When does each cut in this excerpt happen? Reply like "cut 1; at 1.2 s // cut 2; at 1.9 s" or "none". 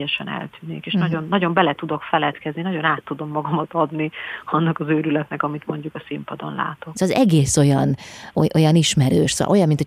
cut 1; at 6.9 s